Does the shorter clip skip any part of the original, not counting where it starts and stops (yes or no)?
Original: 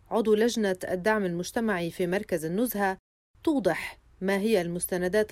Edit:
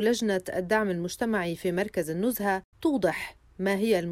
yes